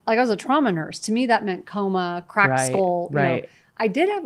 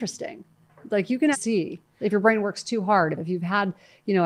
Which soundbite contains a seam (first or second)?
second